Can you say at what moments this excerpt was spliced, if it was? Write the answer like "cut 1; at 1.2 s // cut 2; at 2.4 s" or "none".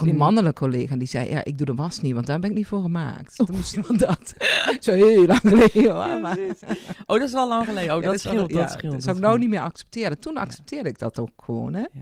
cut 1; at 3.7 s